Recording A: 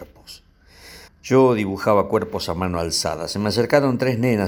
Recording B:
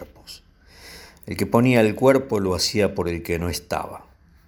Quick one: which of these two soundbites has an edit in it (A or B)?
A